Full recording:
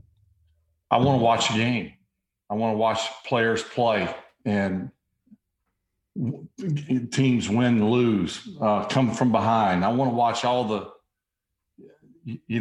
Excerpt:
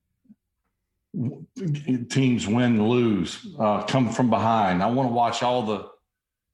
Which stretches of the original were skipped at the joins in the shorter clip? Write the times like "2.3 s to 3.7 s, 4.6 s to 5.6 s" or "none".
none